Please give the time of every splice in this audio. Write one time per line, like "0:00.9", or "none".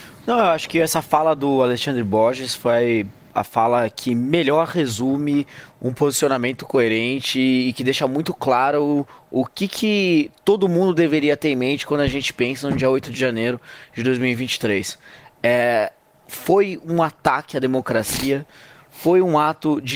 none